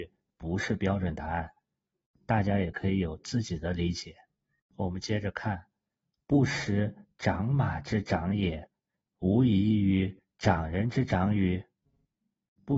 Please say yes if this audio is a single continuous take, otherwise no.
yes